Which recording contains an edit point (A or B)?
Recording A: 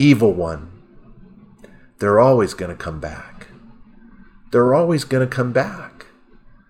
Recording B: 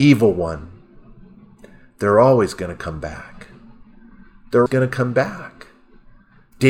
B